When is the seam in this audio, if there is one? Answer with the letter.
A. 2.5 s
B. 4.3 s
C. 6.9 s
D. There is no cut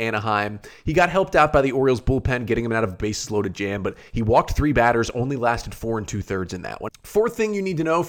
C